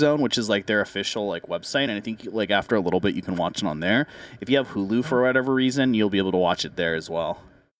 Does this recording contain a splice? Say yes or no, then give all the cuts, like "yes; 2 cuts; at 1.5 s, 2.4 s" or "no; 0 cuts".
no; 0 cuts